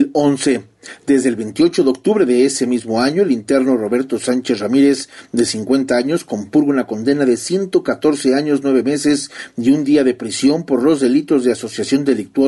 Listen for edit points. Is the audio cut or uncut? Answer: uncut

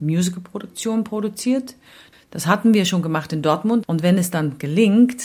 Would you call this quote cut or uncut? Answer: cut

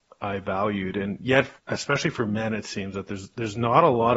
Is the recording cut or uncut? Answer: cut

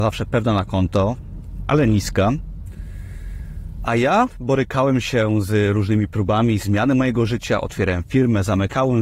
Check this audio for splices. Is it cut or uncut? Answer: uncut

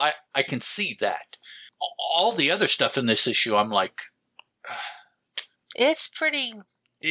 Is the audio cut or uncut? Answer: uncut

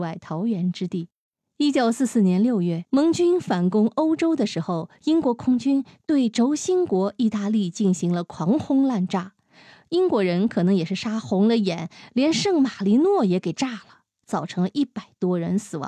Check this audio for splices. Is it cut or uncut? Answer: cut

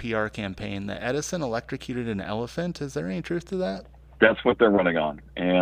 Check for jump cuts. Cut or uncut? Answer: cut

